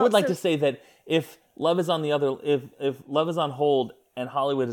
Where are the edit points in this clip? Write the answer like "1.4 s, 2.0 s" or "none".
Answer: none